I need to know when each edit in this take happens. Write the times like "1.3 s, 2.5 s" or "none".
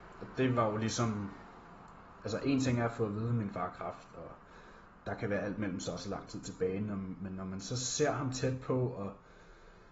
none